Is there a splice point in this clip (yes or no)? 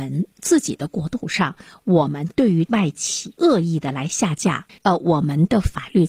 yes